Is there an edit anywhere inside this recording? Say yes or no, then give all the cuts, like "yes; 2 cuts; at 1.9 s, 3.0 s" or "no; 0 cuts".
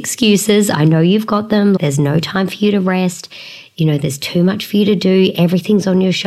yes; 1 cut; at 1.8 s